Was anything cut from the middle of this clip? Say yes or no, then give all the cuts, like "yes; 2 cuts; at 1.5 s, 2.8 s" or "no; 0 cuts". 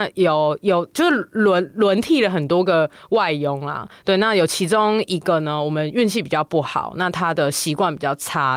no; 0 cuts